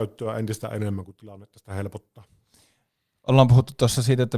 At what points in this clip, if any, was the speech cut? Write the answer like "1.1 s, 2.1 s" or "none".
none